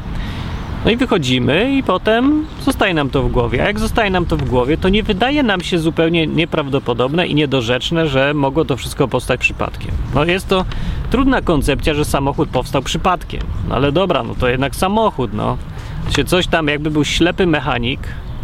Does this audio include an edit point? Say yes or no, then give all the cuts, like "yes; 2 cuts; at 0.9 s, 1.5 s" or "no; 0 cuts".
no; 0 cuts